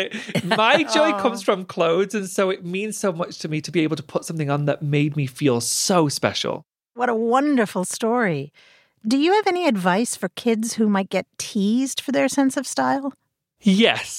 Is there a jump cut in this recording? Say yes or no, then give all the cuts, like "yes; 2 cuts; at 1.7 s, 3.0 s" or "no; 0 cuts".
no; 0 cuts